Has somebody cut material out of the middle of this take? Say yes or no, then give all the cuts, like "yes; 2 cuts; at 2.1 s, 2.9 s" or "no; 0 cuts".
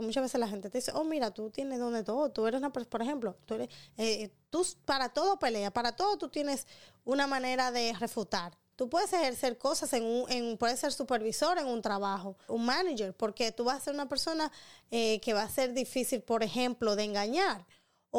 yes; 2 cuts; at 8.7 s, 12.5 s